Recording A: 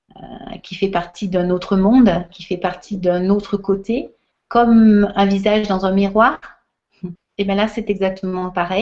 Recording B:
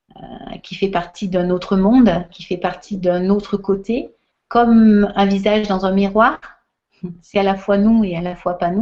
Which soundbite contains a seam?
A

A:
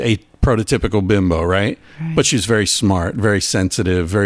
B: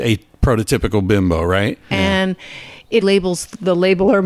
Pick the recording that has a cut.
B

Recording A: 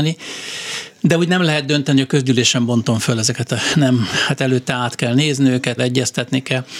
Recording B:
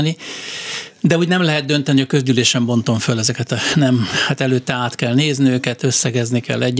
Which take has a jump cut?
A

